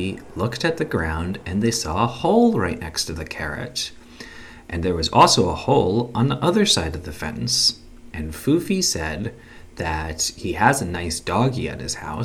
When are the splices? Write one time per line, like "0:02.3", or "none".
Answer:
0:08.1